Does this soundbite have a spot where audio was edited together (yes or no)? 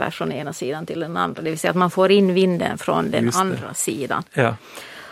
no